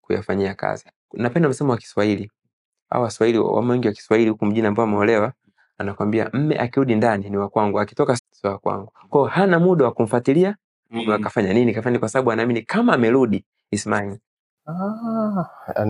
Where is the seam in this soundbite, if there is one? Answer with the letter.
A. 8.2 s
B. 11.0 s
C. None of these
A